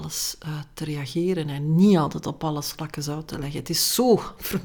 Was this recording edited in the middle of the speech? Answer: no; 0 cuts

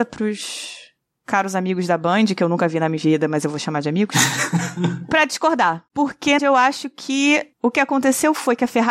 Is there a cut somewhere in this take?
yes; 1 cut; at 6.4 s

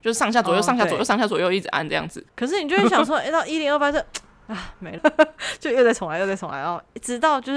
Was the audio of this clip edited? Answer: yes; 1 cut; at 5.0 s

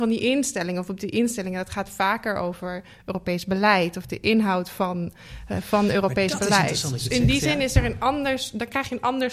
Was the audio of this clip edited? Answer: no; 0 cuts

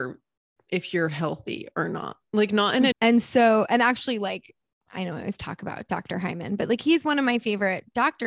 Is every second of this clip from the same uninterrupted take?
no; 1 cut; at 2.9 s

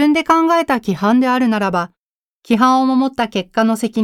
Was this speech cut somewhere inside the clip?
no; 0 cuts

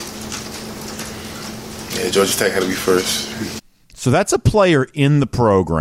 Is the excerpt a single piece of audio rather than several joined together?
yes; 0 cuts

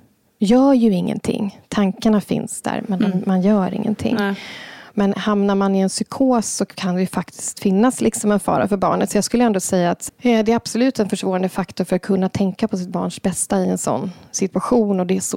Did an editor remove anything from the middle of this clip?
yes; 1 cut; at 10.1 s

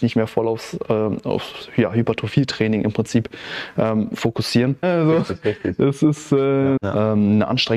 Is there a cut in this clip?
yes; 2 cuts; at 4.8 s, 6.8 s

